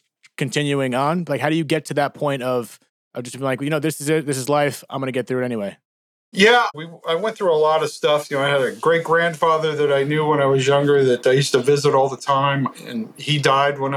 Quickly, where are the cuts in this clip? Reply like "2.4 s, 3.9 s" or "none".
6.7 s